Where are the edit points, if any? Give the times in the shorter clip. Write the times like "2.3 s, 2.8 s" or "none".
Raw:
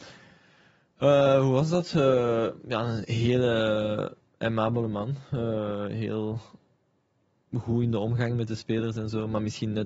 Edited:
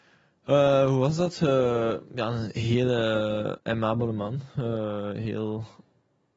3.6 s